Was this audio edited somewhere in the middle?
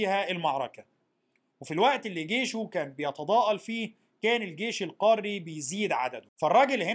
no; 0 cuts

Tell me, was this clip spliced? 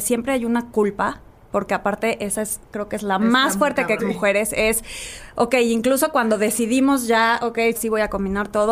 yes; 2 cuts; at 4.0 s, 7.7 s

